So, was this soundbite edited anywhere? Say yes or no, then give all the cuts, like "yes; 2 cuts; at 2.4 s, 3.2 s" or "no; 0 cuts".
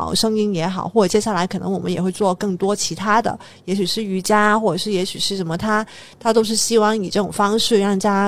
no; 0 cuts